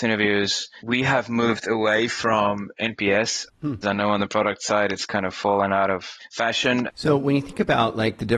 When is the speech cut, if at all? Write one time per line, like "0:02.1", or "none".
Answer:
0:03.8
0:06.9